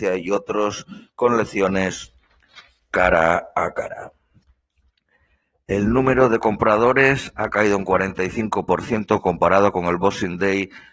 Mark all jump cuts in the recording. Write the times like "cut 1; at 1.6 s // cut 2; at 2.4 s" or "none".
none